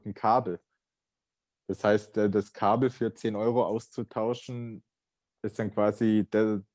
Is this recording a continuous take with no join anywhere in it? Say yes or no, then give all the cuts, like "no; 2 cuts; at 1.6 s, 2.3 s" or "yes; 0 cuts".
yes; 0 cuts